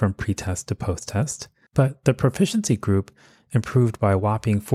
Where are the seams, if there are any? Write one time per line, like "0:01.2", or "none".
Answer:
0:01.7